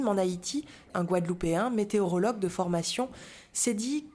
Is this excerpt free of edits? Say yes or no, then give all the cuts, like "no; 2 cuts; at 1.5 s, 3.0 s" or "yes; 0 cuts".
no; 1 cut; at 0.9 s